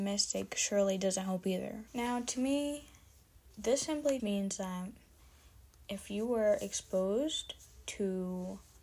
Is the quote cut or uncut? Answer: cut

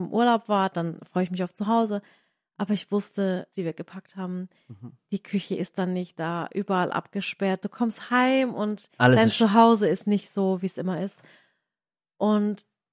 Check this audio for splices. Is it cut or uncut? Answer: cut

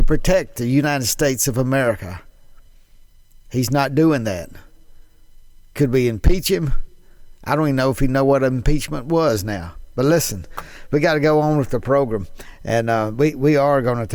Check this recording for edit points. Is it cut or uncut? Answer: uncut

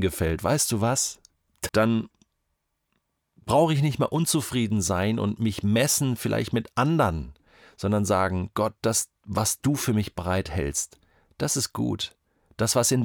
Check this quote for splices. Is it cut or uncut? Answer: cut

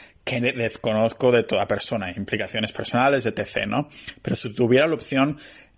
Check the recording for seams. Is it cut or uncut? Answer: uncut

